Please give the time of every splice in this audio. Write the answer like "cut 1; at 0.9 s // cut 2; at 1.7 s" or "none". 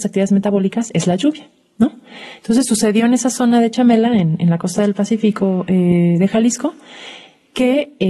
none